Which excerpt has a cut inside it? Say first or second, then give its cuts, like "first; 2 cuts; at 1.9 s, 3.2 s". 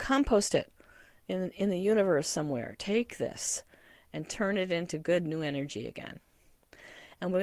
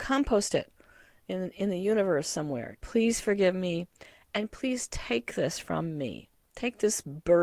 second; 1 cut; at 2.8 s